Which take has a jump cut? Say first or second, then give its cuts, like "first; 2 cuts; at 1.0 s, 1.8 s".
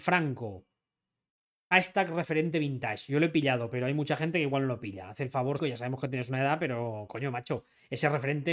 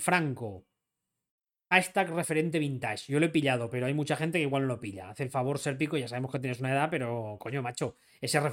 first; 1 cut; at 5.6 s